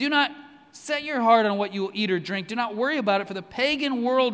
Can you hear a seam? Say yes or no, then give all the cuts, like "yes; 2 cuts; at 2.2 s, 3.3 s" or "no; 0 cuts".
no; 0 cuts